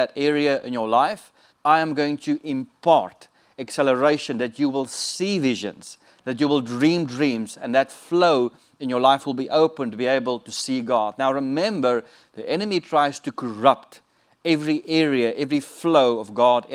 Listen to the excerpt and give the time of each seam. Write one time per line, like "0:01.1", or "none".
0:01.5